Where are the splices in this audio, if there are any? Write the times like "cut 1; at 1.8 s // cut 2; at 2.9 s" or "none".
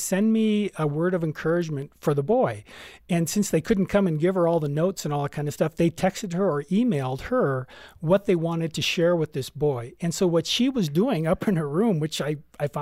none

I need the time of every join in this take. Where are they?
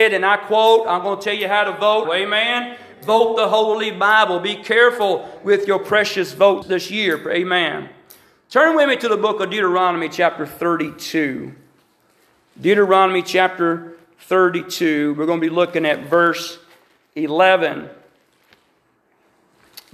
cut 1; at 2.0 s // cut 2; at 6.6 s

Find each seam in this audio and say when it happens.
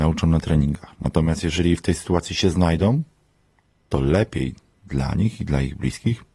none

